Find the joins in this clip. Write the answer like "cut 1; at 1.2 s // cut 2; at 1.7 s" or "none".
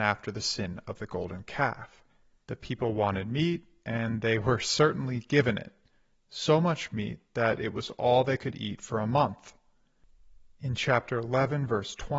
cut 1; at 2.4 s